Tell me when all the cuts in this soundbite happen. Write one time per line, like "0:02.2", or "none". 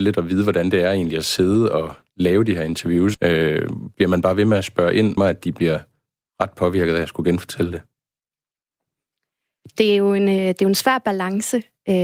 0:03.1
0:05.2